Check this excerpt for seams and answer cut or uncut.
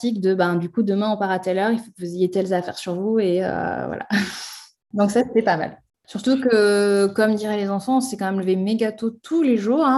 uncut